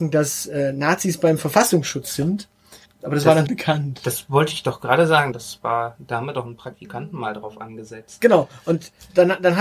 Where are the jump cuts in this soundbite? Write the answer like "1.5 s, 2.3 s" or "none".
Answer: 3.5 s, 5.3 s